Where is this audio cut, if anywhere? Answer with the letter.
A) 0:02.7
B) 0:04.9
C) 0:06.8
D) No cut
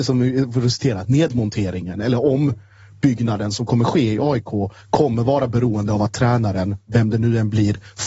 D